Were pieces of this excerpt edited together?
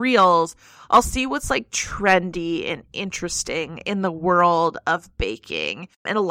no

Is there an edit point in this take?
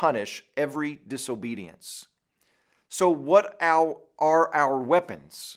no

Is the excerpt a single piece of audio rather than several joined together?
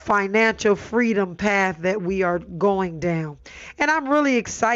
yes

